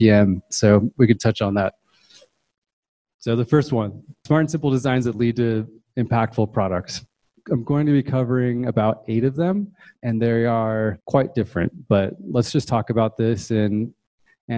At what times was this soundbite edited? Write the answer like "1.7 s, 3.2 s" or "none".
7.4 s